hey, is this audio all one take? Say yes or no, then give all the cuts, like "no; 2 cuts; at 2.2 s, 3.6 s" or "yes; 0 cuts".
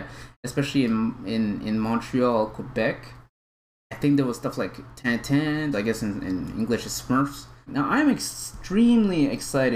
no; 2 cuts; at 5.7 s, 7.7 s